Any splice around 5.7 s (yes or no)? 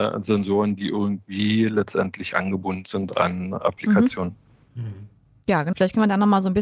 yes